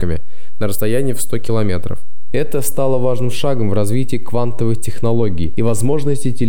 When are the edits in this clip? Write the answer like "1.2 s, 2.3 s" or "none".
none